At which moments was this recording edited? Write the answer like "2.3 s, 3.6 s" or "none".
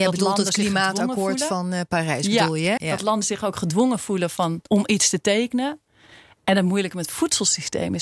2.8 s, 5.9 s